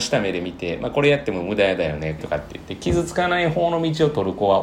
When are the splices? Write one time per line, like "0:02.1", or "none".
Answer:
0:02.2